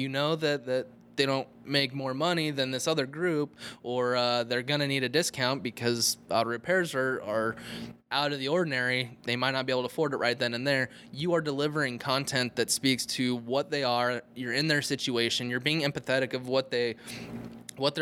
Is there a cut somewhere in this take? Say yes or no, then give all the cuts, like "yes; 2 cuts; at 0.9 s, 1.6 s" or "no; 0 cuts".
no; 0 cuts